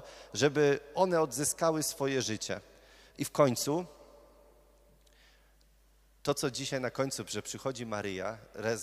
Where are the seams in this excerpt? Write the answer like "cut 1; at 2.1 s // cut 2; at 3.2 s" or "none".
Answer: none